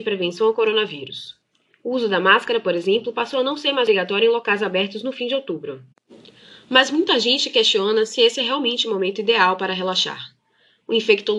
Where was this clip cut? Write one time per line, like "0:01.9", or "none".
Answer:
none